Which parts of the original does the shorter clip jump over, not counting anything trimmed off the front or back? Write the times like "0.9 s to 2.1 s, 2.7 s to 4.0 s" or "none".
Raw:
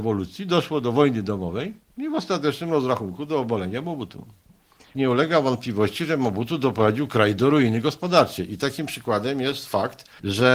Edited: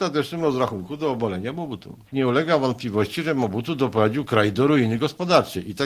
4.3 s to 4.9 s